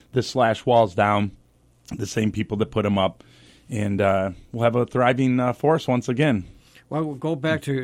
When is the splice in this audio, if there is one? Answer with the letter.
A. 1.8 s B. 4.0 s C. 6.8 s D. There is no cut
D